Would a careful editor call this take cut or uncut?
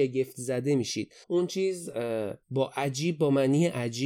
cut